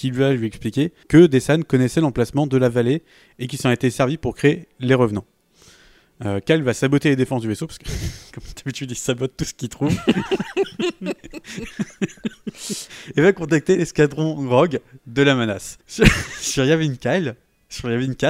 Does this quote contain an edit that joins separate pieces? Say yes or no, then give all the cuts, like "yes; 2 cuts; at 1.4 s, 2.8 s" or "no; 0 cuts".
yes; 2 cuts; at 1.0 s, 15.8 s